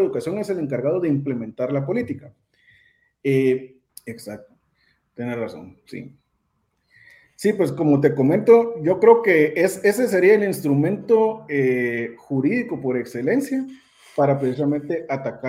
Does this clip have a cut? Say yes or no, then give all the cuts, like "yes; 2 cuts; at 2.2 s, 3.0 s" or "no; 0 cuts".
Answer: yes; 1 cut; at 3.9 s